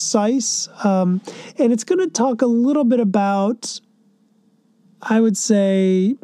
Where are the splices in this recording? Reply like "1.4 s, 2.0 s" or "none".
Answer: none